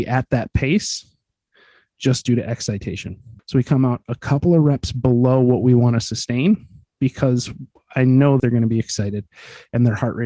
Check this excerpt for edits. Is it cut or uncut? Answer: cut